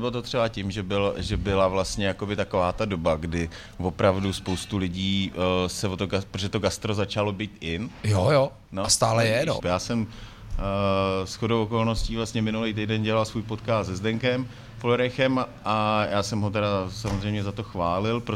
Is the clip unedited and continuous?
no; 1 cut; at 9.6 s

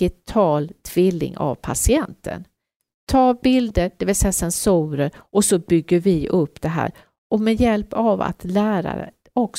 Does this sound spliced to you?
no; 0 cuts

